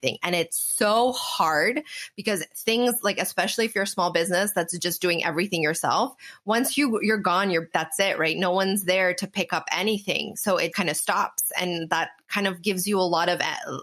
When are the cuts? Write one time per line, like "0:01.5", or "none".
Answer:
0:07.7
0:10.7